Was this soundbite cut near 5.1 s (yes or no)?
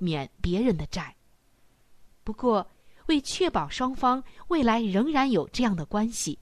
no